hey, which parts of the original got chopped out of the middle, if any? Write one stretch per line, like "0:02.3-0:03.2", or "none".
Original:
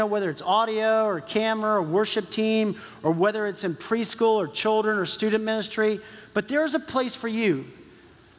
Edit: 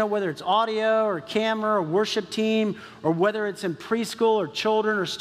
none